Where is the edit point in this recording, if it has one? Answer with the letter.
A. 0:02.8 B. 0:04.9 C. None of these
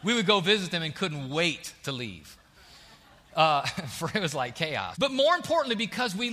B